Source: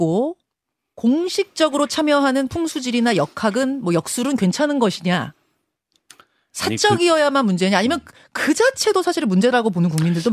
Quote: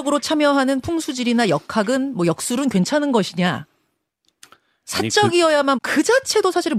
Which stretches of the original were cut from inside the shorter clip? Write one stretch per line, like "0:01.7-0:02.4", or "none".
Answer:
0:07.4-0:08.3